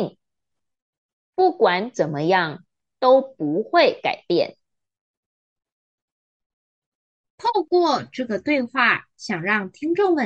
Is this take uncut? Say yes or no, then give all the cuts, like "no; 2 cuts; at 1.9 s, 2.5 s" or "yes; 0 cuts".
yes; 0 cuts